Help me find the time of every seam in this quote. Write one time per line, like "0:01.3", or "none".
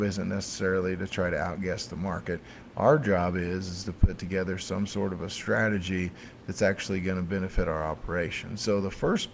none